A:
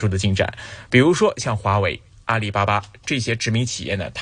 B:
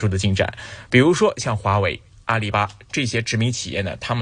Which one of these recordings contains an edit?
B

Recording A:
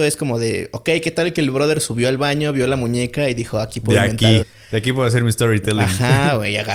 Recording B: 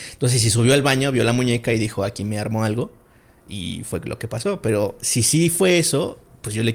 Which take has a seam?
A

